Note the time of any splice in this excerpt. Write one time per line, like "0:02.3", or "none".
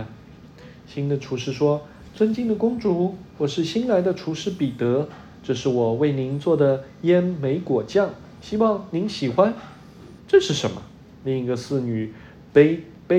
0:10.2

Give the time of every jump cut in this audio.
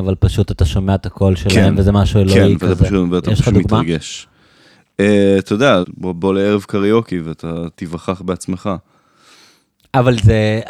0:05.8
0:07.7

